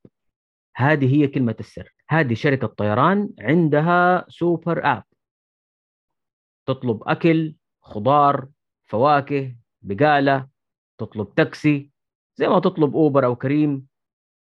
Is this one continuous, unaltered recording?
yes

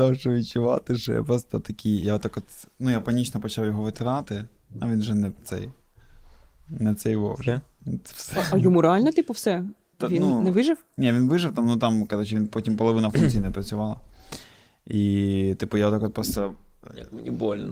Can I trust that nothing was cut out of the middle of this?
yes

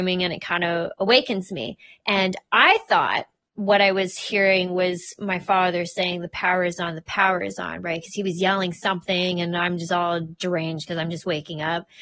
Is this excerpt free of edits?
yes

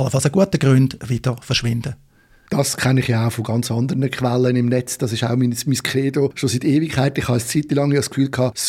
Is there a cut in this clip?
no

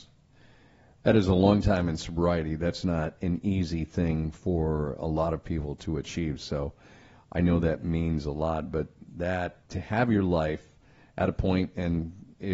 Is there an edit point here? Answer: yes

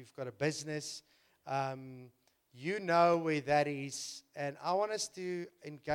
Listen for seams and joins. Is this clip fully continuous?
yes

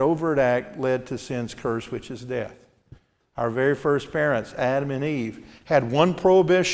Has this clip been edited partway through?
yes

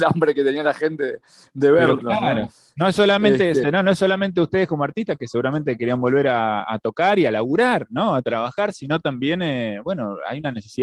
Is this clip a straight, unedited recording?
no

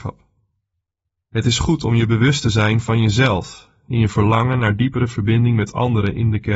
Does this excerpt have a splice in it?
yes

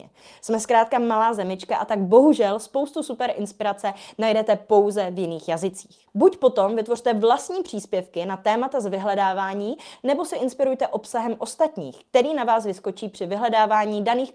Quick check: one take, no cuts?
yes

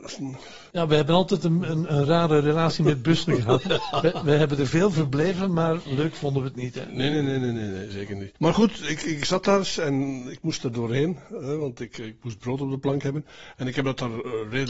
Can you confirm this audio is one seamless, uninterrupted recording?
yes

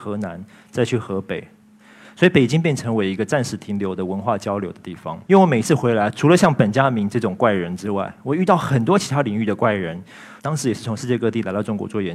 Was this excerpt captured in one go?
no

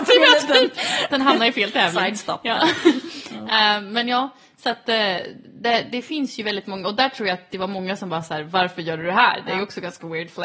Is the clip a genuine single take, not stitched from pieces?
yes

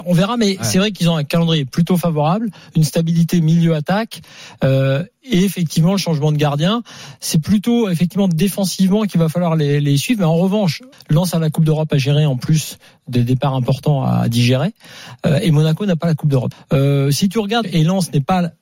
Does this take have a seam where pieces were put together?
yes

